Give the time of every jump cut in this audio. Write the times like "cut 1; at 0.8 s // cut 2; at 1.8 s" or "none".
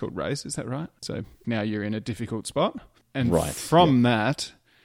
cut 1; at 1.4 s

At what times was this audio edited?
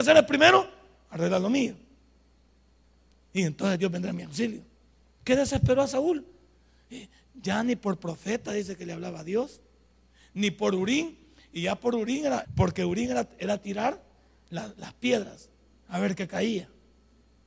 cut 1; at 12.4 s

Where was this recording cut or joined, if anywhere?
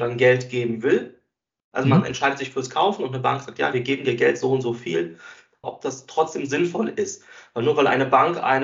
cut 1; at 5.6 s

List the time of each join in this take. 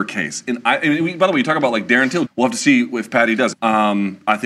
cut 1; at 2.3 s // cut 2; at 3.5 s

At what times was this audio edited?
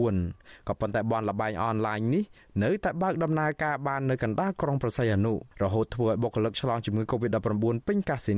cut 1; at 5.5 s

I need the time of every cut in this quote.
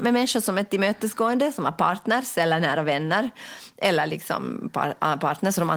none

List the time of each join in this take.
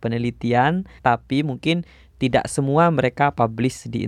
cut 1; at 1.0 s

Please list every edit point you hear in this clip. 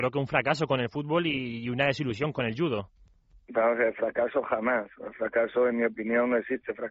none

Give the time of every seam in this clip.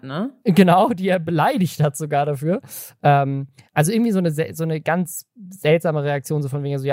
cut 1; at 3.0 s

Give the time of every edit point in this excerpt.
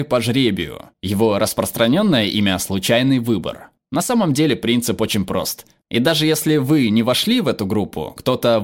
cut 1; at 5.8 s

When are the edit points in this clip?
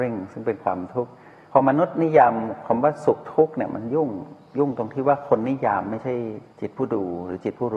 none

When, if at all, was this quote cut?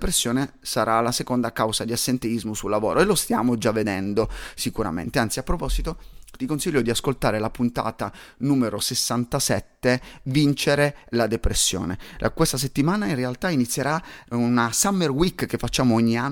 none

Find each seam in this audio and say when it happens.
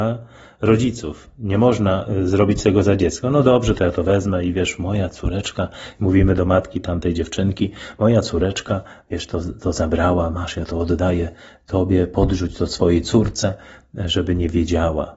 none

